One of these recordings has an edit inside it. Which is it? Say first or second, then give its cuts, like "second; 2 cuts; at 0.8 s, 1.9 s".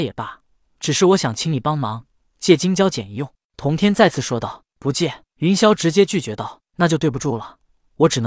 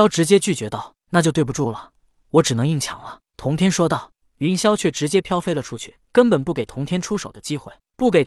second; 2 cuts; at 4.2 s, 6.0 s